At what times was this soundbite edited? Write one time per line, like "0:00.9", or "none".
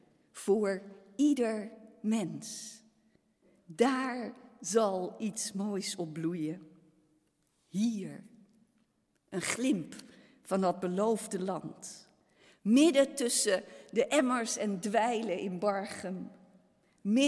none